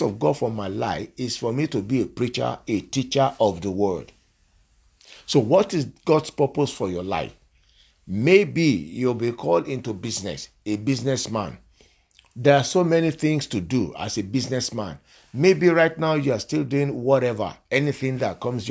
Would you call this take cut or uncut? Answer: uncut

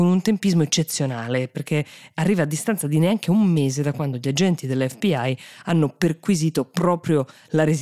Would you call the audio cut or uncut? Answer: uncut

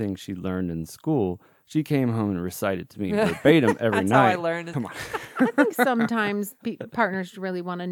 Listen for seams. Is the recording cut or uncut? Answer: cut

